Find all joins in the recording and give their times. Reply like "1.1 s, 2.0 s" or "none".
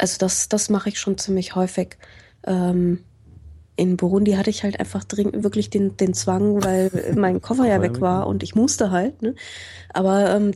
none